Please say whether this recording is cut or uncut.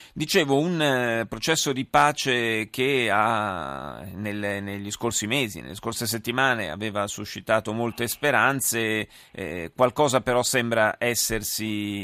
uncut